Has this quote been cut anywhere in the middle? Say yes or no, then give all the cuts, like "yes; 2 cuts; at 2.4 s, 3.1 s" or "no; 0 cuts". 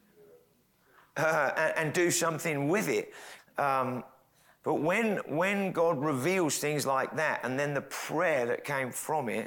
yes; 1 cut; at 3.4 s